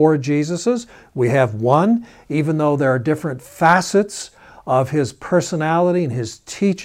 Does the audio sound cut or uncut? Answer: uncut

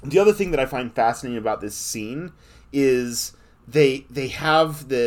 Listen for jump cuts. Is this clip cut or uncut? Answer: uncut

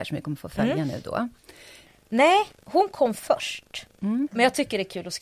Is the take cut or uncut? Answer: cut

